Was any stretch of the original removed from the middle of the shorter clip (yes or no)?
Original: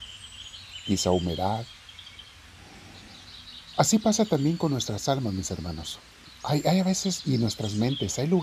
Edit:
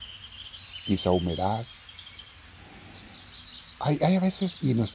yes